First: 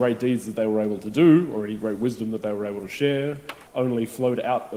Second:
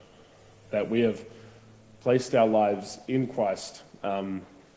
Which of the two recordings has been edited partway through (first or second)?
first